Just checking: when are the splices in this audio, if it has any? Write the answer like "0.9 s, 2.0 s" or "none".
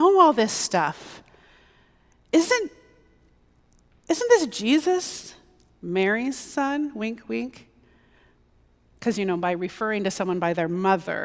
none